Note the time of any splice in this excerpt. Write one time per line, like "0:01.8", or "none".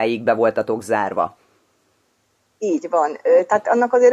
none